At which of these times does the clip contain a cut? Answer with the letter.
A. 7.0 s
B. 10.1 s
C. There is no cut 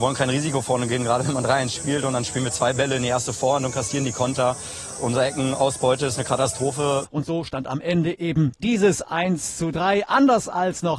A